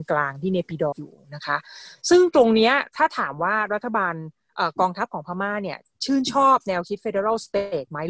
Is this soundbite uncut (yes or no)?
no